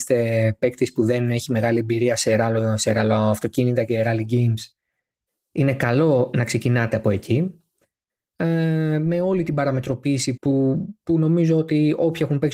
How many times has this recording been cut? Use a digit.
1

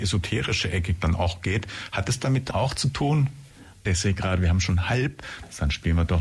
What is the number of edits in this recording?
2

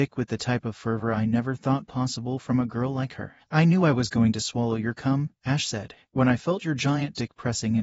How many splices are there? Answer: 1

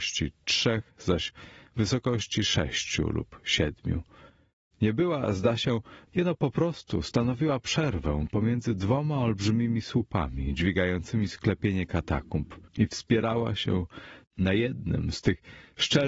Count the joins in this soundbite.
2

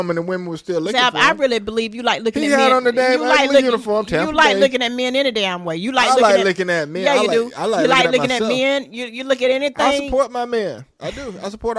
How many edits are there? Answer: 0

